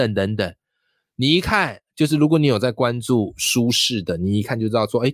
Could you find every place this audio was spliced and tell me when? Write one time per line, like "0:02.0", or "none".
none